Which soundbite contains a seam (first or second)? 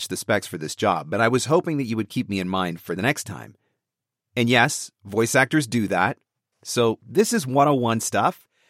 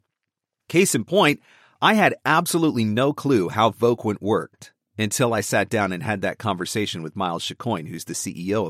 first